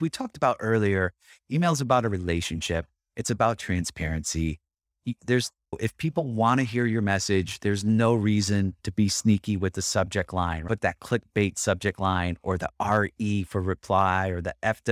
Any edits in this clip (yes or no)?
no